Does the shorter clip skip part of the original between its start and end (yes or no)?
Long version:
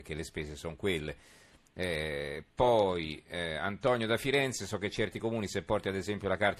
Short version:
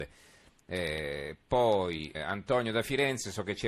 yes